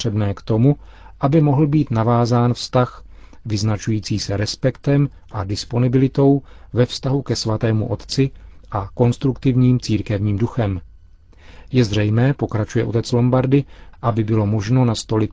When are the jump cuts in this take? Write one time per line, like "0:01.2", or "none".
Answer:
0:13.9